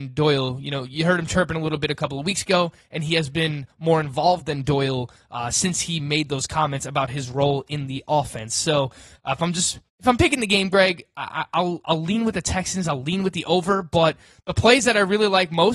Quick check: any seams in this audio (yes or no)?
yes